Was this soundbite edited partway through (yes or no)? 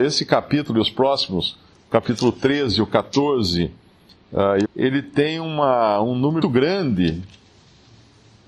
yes